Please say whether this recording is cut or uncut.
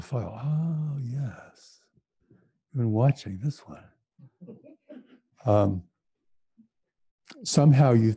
cut